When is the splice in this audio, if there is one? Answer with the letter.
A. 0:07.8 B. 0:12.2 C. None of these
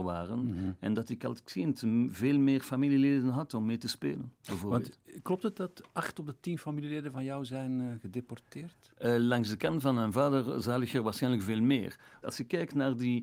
B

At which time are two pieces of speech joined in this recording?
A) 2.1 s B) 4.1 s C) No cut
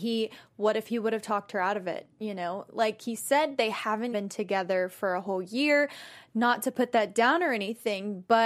B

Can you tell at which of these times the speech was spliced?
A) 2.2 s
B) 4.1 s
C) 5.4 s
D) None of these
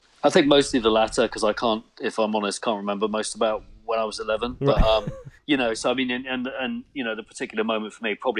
C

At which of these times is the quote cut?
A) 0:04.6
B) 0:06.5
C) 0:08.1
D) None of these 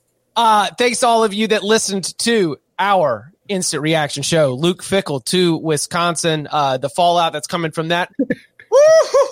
C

